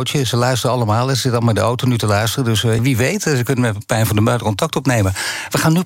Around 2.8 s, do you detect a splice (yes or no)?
yes